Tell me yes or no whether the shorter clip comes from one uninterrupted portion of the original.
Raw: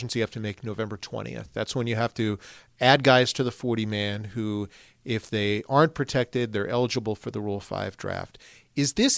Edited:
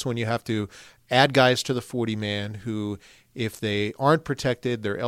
yes